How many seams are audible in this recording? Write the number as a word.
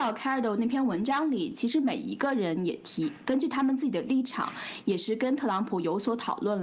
zero